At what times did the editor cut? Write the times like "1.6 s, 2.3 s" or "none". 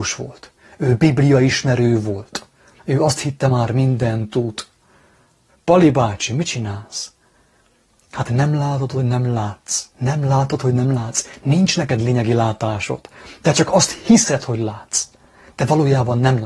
2.8 s, 5.5 s, 9.9 s